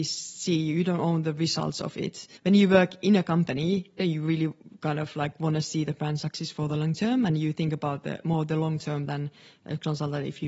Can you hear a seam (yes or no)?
yes